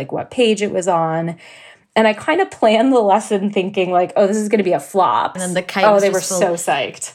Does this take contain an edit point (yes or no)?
yes